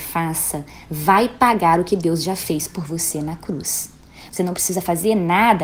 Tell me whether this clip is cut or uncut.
cut